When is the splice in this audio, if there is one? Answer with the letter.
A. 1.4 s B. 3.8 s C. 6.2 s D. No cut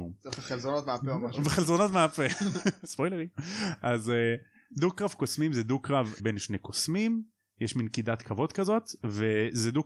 C